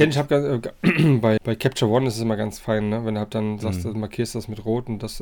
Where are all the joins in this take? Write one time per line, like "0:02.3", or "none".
0:01.4